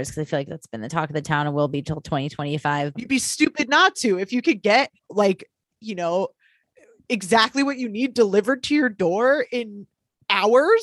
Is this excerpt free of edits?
no; 2 cuts; at 2.9 s, 5.0 s

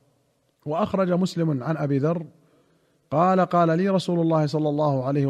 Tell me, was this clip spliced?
no; 0 cuts

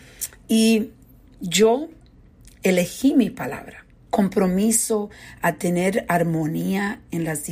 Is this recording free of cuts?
no; 1 cut; at 4.1 s

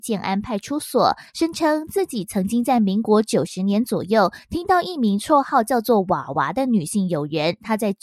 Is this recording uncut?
no; 1 cut; at 1.3 s

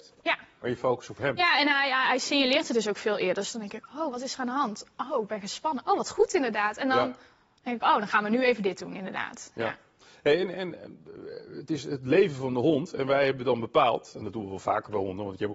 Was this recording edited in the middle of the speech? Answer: no; 0 cuts

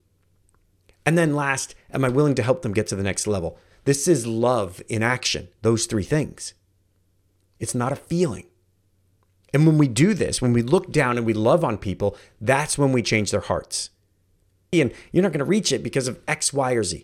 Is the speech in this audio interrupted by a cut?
yes; 1 cut; at 14.7 s

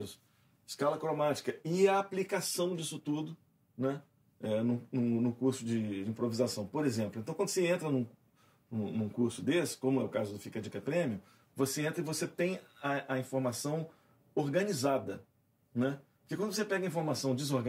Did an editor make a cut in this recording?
no; 0 cuts

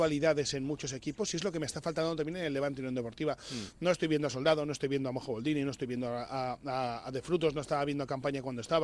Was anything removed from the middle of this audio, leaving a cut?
no; 0 cuts

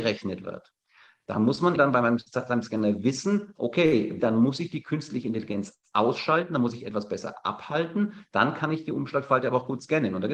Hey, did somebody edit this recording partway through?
yes; 2 cuts; at 1.8 s, 4.2 s

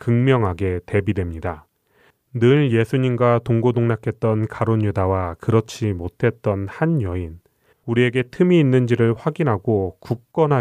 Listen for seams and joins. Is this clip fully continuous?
no; 1 cut; at 7.7 s

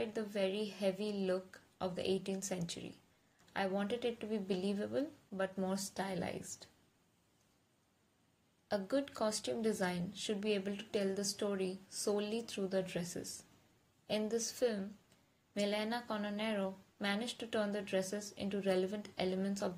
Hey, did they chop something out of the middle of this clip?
no; 0 cuts

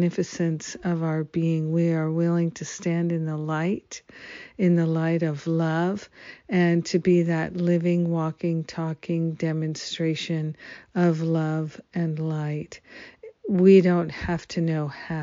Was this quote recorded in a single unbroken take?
yes; 0 cuts

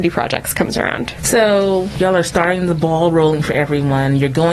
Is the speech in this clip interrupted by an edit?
no; 0 cuts

